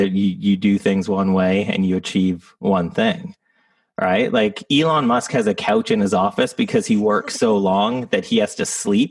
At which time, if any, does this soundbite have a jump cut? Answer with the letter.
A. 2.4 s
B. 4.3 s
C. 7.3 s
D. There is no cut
D